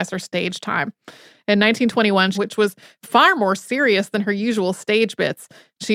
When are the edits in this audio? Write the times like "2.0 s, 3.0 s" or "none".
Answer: 2.3 s